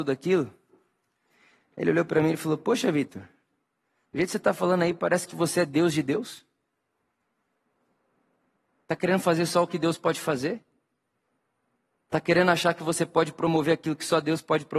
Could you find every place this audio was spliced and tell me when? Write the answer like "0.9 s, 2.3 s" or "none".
none